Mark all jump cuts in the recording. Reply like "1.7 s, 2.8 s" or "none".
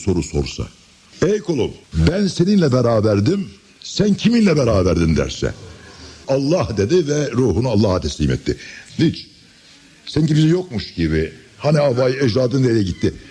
1.8 s, 6.2 s, 8.9 s